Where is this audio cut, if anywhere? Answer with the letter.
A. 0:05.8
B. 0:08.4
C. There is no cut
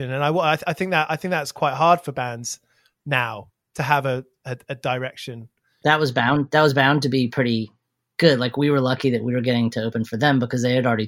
A